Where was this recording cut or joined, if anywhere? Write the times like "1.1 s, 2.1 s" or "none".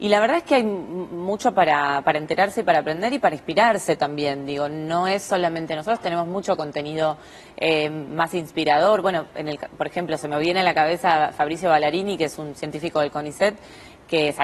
none